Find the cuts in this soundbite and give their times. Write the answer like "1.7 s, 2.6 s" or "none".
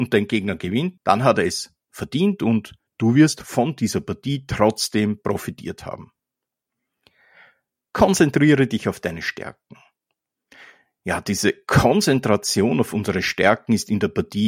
1.0 s